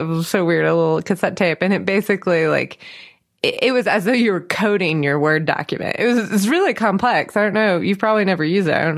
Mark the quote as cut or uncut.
uncut